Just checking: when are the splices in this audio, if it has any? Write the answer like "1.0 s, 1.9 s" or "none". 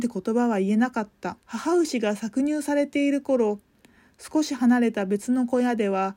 1.4 s

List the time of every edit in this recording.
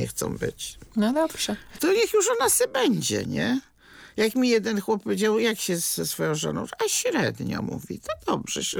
none

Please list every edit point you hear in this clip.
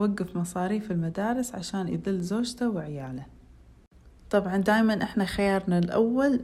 4.2 s

